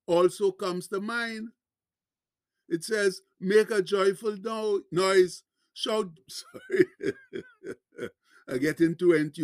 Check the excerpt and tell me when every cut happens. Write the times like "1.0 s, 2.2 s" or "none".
6.2 s